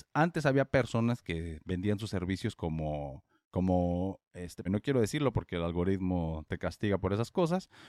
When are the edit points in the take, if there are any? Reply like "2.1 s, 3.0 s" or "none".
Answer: 4.7 s